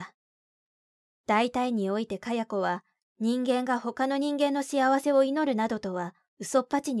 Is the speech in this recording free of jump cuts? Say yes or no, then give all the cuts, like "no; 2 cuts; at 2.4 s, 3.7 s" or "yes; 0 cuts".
yes; 0 cuts